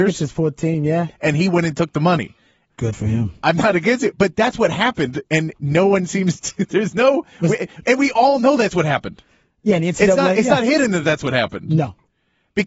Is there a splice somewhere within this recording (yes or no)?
yes